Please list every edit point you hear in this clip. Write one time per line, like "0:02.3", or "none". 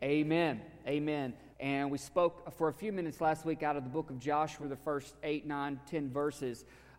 0:01.5
0:04.6